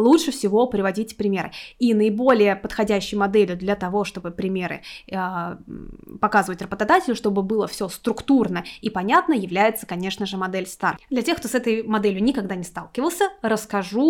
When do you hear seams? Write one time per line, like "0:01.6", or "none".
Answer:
none